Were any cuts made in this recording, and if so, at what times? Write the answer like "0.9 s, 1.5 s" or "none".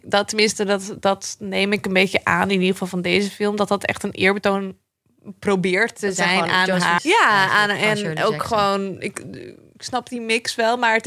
7.0 s